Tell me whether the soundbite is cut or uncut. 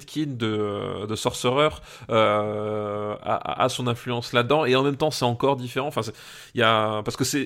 uncut